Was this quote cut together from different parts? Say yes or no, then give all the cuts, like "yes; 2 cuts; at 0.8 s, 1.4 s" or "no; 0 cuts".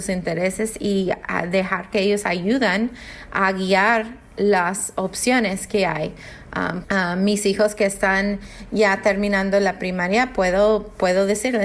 yes; 1 cut; at 6.8 s